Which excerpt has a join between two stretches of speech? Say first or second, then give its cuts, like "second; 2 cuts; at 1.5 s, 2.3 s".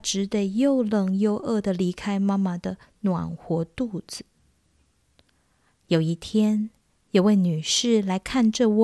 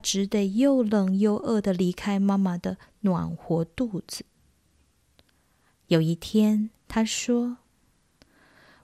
second; 1 cut; at 6.8 s